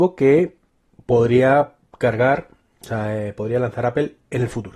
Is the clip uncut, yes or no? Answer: yes